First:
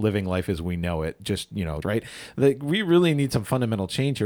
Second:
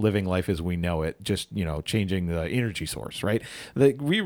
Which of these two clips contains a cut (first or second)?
first